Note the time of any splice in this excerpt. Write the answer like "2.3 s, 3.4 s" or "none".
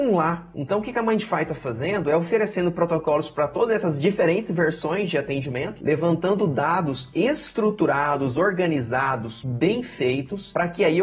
none